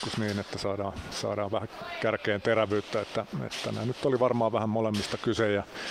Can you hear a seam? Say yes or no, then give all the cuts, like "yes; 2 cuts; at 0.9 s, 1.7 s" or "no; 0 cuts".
no; 0 cuts